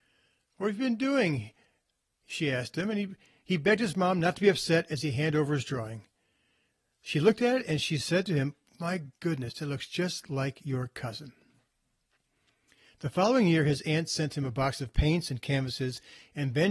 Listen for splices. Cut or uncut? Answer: uncut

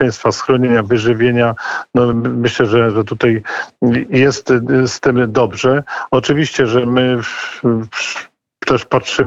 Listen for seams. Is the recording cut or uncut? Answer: uncut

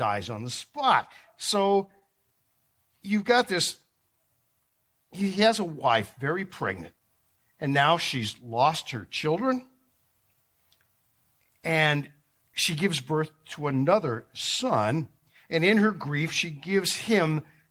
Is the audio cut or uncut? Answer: uncut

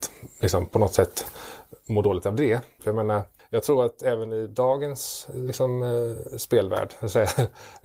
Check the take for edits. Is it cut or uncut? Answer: cut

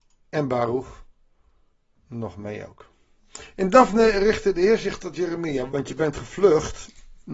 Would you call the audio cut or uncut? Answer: cut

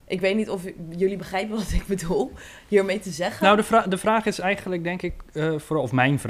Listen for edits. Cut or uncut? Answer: uncut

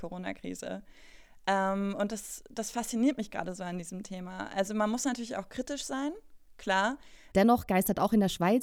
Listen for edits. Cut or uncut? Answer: cut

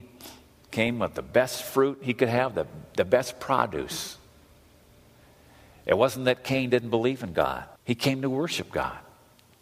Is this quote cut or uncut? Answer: cut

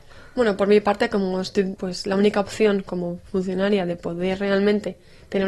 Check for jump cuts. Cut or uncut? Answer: cut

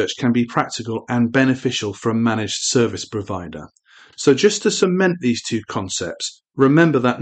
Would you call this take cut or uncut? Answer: cut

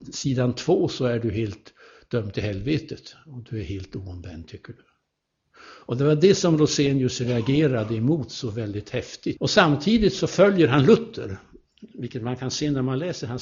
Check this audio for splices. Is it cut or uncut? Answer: cut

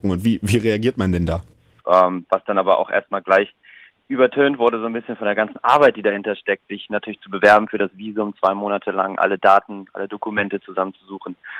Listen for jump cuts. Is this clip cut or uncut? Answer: cut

